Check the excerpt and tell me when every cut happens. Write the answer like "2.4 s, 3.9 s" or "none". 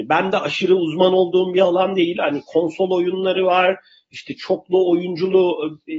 none

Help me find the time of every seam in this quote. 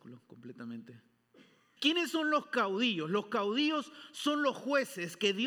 1.8 s

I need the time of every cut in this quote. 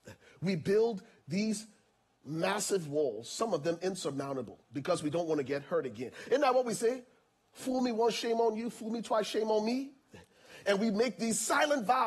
none

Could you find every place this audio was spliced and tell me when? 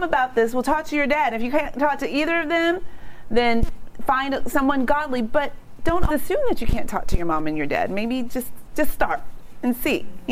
6.1 s

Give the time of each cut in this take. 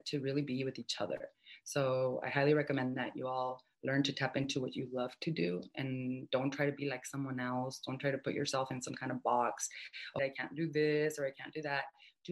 10.2 s

